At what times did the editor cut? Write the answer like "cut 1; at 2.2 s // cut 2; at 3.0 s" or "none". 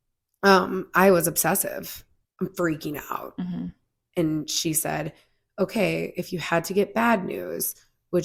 cut 1; at 2.2 s